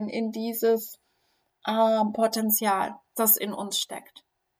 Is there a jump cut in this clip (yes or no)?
no